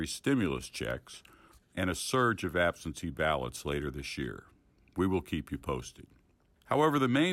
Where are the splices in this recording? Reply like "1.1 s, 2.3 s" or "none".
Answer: 1.6 s